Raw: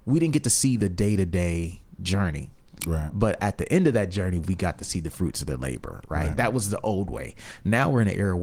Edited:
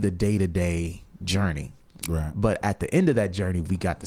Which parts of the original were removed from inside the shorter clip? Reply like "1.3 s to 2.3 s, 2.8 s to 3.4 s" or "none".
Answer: none